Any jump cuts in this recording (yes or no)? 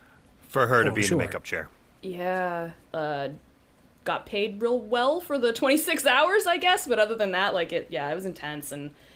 yes